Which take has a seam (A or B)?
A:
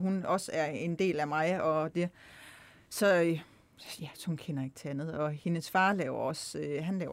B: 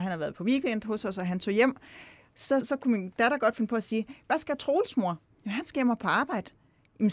B